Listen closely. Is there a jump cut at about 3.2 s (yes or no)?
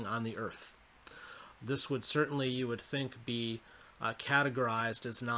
no